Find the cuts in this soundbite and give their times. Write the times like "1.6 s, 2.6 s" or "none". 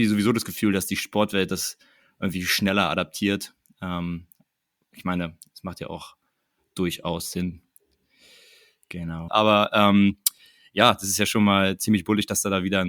9.3 s